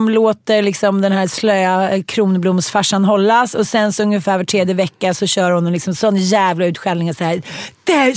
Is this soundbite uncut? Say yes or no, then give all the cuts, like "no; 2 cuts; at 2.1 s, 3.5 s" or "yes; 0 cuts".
yes; 0 cuts